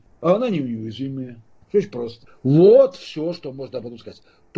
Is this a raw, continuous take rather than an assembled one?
yes; 0 cuts

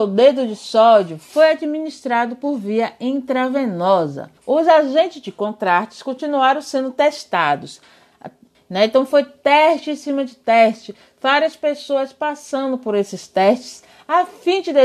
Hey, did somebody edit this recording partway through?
yes; 2 cuts; at 4.4 s, 8.5 s

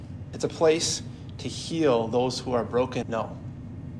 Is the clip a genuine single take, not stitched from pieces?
no; 1 cut; at 3.0 s

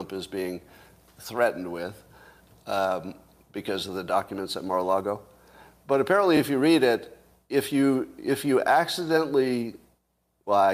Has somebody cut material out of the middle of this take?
no; 0 cuts

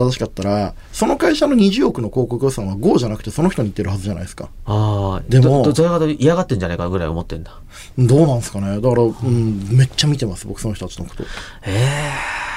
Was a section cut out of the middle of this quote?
yes; 1 cut; at 4.7 s

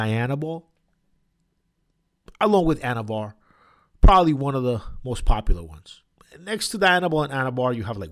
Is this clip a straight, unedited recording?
yes; 0 cuts

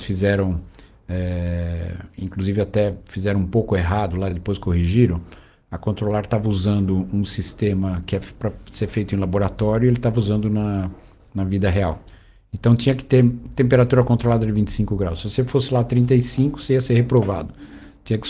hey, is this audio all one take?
yes; 0 cuts

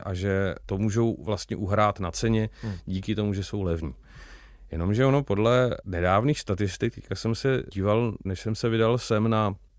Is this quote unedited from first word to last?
yes; 0 cuts

